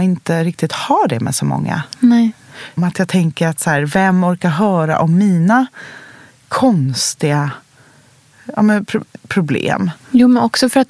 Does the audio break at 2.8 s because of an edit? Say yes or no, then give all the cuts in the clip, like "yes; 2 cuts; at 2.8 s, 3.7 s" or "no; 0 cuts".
yes; 1 cut; at 2.8 s